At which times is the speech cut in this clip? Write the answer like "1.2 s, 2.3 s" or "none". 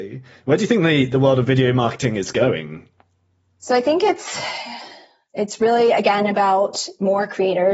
none